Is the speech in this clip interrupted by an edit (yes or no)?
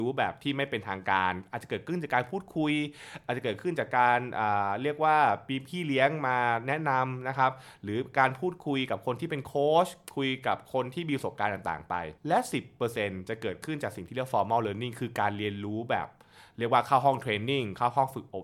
yes